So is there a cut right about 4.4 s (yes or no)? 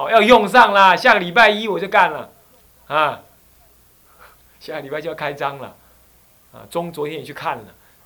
no